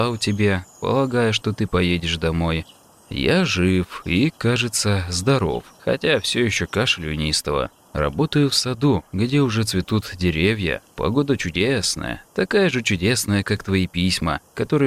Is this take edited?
no; 0 cuts

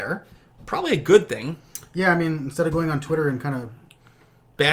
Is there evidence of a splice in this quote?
no; 0 cuts

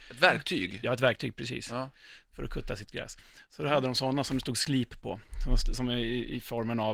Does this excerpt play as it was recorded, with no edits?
yes; 0 cuts

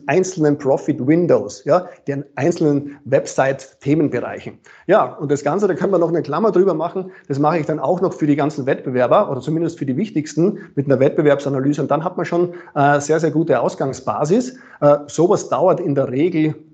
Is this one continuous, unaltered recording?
yes; 0 cuts

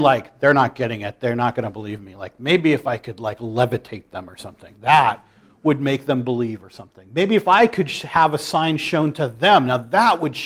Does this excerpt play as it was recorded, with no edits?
yes; 0 cuts

